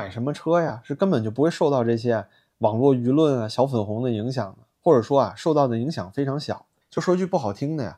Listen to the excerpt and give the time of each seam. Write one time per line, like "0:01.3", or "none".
0:06.8